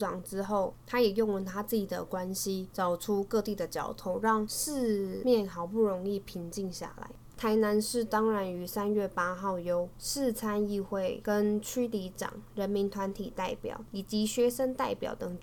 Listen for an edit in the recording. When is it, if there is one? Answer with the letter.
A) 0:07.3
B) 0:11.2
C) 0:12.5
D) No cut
A